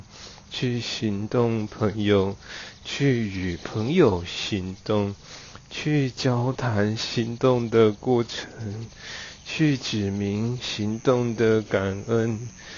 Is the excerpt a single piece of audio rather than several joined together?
yes; 0 cuts

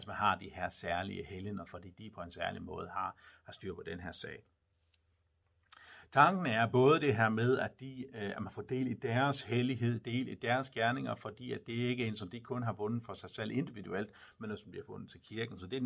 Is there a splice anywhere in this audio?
yes; 1 cut; at 1.7 s

